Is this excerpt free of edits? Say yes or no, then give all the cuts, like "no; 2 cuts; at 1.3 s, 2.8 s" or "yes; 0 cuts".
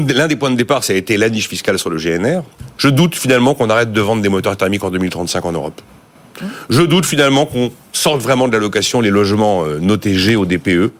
no; 1 cut; at 2.8 s